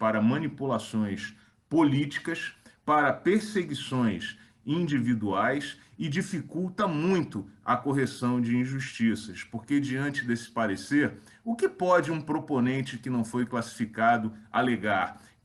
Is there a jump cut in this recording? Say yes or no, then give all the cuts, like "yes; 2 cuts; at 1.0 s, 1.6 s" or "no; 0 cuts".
no; 0 cuts